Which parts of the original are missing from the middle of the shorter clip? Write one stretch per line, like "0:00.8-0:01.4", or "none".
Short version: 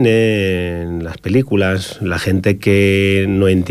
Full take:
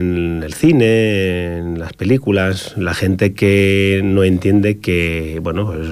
none